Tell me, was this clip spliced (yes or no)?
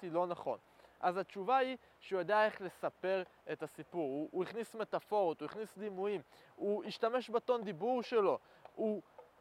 no